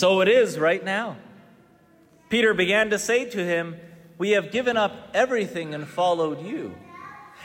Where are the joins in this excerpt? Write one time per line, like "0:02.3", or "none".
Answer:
none